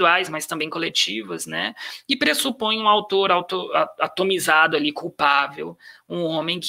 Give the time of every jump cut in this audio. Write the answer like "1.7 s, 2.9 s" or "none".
none